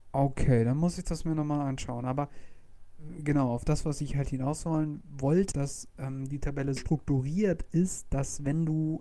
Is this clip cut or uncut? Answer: cut